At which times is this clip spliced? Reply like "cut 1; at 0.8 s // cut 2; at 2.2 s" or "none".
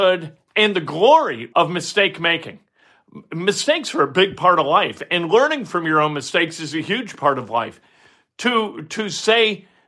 cut 1; at 1.5 s